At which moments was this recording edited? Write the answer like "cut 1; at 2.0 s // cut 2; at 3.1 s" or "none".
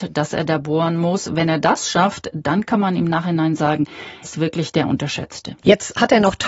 cut 1; at 4.2 s // cut 2; at 5.6 s